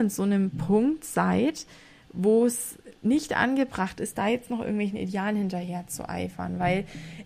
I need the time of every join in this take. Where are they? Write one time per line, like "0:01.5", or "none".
none